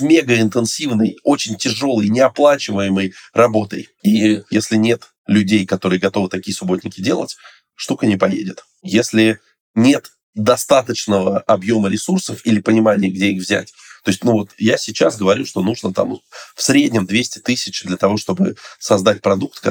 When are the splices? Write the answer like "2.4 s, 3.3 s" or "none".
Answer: none